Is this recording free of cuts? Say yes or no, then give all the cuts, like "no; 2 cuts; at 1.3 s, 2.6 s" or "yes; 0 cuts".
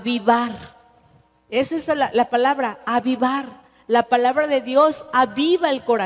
yes; 0 cuts